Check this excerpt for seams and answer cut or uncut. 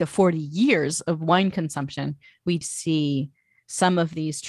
cut